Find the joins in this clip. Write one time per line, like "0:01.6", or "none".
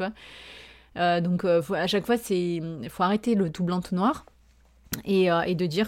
none